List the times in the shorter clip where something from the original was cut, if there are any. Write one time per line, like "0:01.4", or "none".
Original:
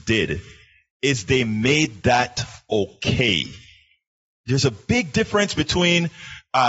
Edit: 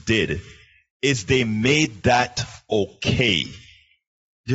none